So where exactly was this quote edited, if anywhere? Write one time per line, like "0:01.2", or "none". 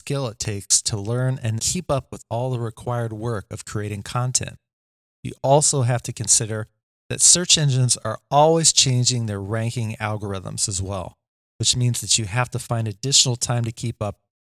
0:01.6